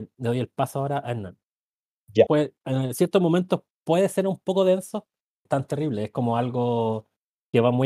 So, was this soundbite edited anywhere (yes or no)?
yes